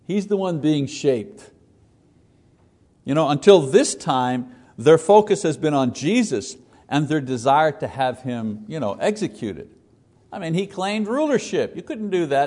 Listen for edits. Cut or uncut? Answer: cut